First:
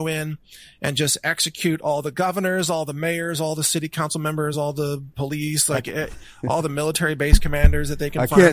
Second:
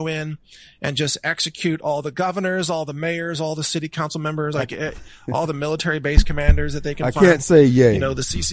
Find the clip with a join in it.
second; 1 cut; at 4.5 s

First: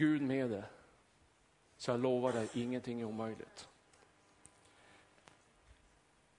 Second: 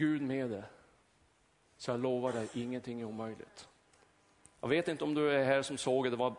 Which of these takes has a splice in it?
second; 1 cut; at 4.5 s

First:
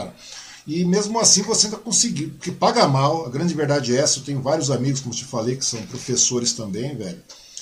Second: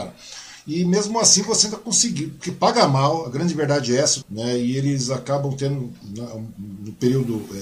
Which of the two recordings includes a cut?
second; 1 cut; at 4.2 s

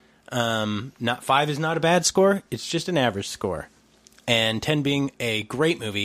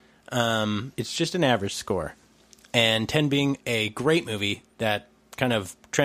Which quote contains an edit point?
second; 1 cut; at 0.9 s

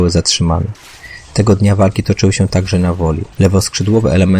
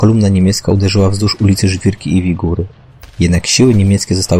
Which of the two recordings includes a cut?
first; 1 cut; at 3.3 s

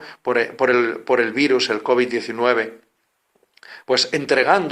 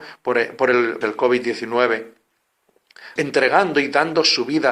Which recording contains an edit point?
second; 2 cuts; at 1.0 s, 3.2 s

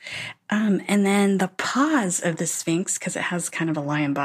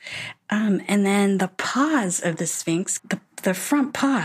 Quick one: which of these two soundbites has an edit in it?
second; 1 cut; at 3.0 s

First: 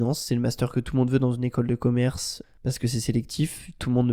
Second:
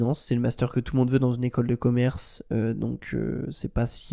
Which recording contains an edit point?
first; 1 cut; at 2.4 s

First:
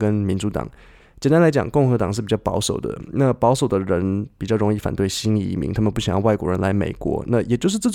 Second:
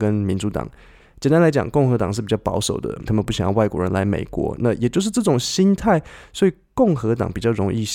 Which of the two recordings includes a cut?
second; 1 cut; at 3.1 s

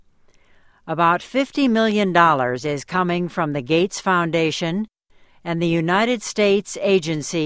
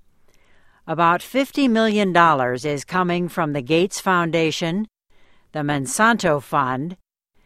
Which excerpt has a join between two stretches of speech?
first; 1 cut; at 5.3 s

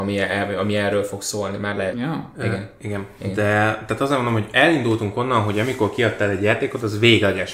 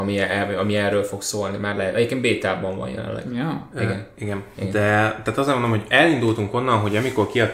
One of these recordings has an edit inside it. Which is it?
first; 1 cut; at 1.9 s

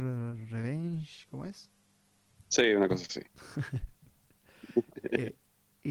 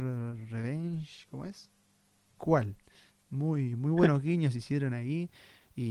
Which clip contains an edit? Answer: second; 1 cut; at 2.4 s

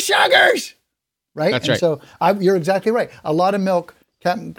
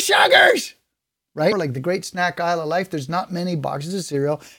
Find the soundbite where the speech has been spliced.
second; 1 cut; at 1.5 s

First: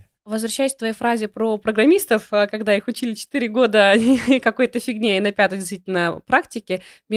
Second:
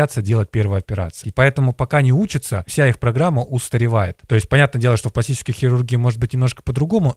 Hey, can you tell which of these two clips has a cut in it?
second; 1 cut; at 1.2 s

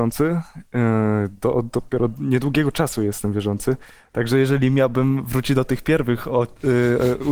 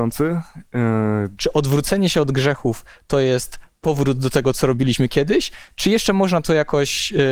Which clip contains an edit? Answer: second; 1 cut; at 1.4 s

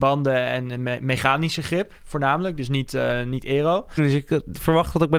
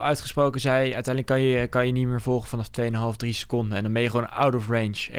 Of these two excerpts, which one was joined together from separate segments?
first; 1 cut; at 4.0 s

